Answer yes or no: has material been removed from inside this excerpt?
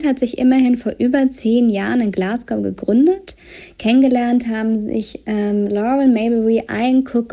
no